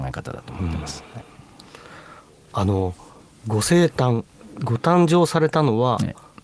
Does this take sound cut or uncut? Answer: uncut